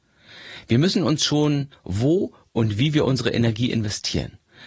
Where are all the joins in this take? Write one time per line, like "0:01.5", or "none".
0:01.7